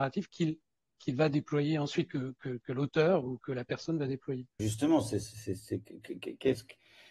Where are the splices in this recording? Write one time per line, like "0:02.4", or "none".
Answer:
0:04.6